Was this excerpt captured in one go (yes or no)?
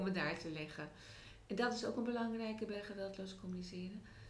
yes